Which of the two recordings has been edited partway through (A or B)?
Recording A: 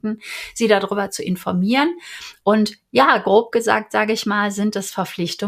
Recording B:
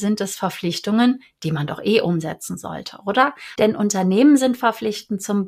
B